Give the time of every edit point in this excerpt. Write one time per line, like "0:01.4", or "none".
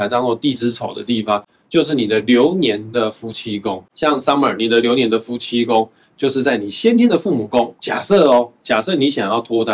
0:07.8